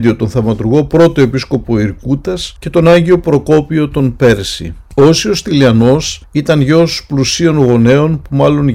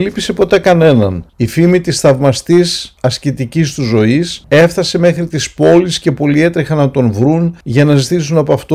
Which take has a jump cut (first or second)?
second